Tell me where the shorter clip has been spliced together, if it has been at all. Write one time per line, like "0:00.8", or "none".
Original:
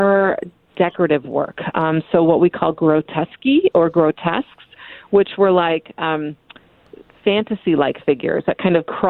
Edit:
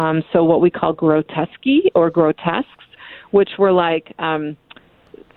none